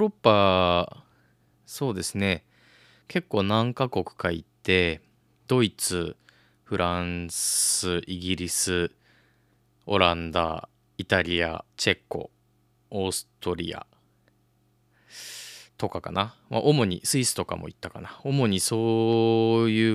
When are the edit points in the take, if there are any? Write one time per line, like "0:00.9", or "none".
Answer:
0:05.5
0:11.7

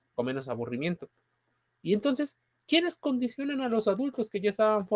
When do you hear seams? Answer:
0:01.7

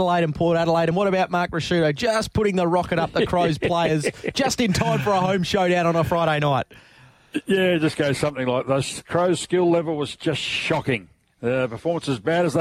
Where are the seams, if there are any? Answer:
none

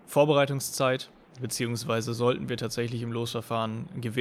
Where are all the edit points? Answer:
none

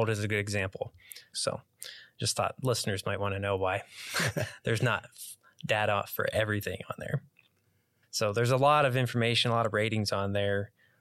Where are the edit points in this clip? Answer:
0:01.3
0:08.0

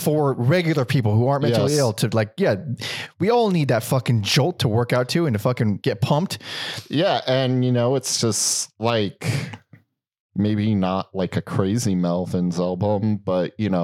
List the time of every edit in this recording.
0:05.8

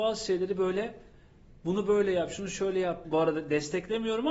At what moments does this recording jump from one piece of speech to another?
0:03.0

